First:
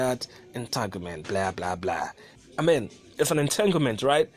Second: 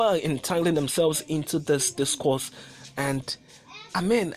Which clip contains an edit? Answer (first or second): first